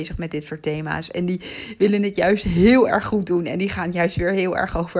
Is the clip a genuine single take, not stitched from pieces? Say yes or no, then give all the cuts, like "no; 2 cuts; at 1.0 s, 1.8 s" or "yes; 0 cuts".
yes; 0 cuts